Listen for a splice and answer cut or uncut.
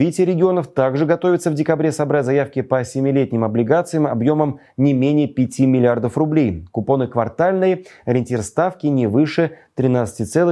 uncut